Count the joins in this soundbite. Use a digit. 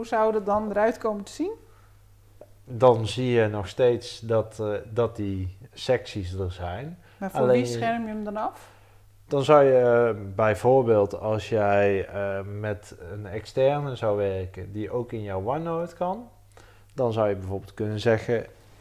0